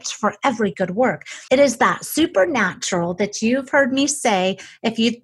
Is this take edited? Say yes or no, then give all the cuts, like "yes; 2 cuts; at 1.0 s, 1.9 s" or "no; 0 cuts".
yes; 1 cut; at 1.5 s